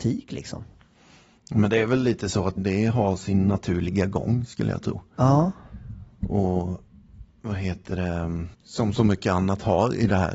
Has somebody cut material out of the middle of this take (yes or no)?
yes